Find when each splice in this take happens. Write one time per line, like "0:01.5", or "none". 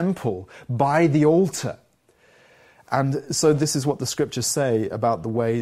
none